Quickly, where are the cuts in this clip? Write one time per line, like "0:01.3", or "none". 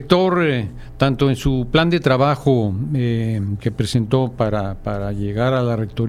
none